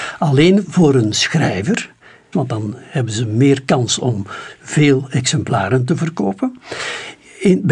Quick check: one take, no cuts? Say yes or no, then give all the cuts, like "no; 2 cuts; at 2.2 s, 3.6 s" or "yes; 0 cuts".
no; 1 cut; at 2.3 s